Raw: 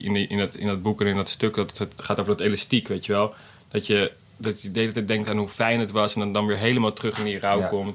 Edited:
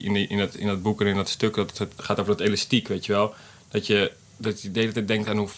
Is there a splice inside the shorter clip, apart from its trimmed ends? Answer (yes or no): no